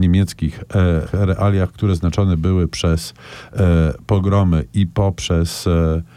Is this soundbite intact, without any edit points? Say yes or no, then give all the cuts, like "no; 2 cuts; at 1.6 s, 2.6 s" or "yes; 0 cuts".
no; 1 cut; at 1.1 s